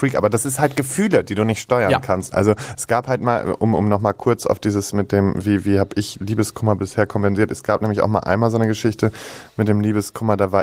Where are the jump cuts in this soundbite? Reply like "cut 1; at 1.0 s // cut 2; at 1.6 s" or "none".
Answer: cut 1; at 2.3 s